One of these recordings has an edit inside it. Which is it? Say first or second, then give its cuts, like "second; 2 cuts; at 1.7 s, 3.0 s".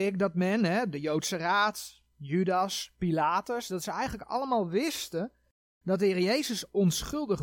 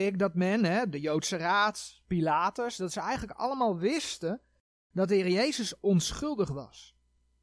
second; 1 cut; at 2.0 s